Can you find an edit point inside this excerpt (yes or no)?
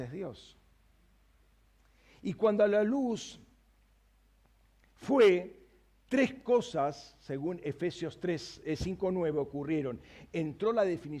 no